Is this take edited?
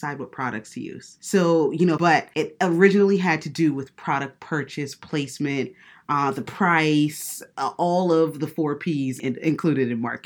yes; 1 cut; at 2.0 s

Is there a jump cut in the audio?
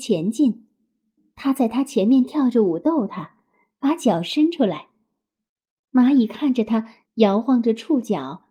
yes; 1 cut; at 7.1 s

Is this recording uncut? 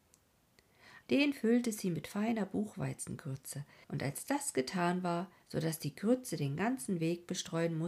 no; 3 cuts; at 1.0 s, 3.8 s, 5.4 s

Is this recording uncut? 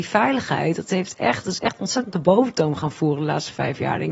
yes; 0 cuts

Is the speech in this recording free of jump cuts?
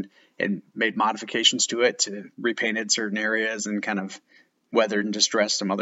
no; 1 cut; at 2.3 s

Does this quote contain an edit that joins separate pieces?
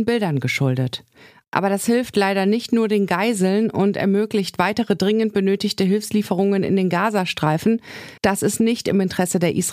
yes; 1 cut; at 8.2 s

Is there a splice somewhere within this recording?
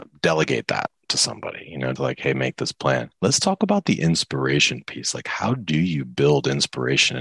yes; 2 cuts; at 2.0 s, 3.1 s

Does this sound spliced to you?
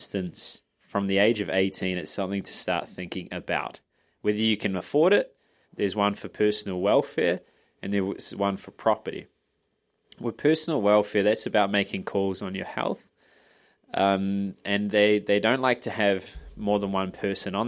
yes; 1 cut; at 5.7 s

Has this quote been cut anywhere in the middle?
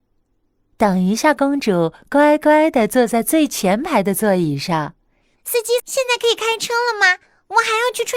yes; 1 cut; at 5.8 s

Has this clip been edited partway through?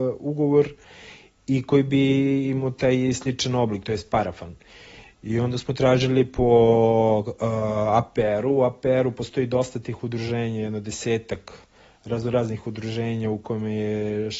no; 0 cuts

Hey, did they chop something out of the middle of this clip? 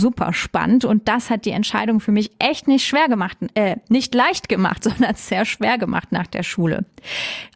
no; 0 cuts

